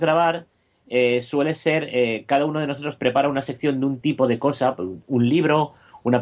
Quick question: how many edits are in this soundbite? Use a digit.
0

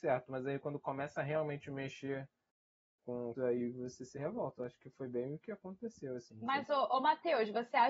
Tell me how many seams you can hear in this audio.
1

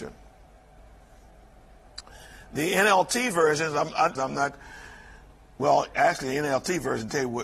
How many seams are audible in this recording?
1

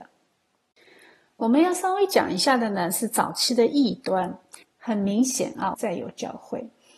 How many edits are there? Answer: 2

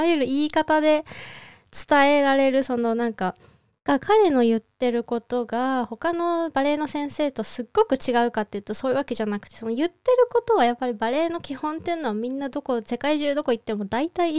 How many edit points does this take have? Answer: 1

